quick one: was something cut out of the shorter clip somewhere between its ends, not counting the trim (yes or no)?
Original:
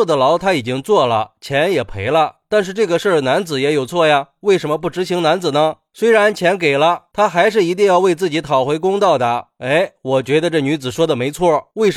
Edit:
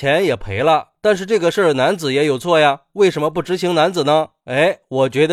yes